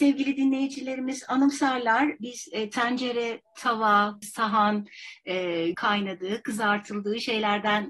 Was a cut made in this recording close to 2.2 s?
no; 2 cuts; at 4.2 s, 5.7 s

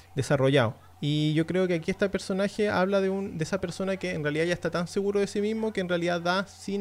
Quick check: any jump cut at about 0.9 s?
yes; 1 cut; at 0.9 s

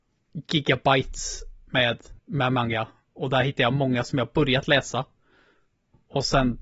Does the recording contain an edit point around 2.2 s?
yes; 1 cut; at 2.2 s

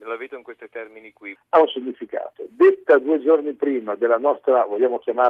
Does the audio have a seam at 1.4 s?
yes; 1 cut; at 1.4 s

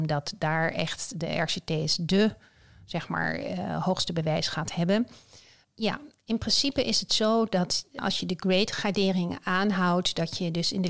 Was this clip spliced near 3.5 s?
no; 1 cut; at 5.6 s

